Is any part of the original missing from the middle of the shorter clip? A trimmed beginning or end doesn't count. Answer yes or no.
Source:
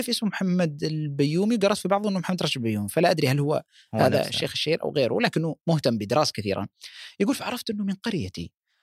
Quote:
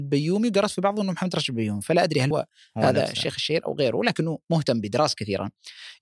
yes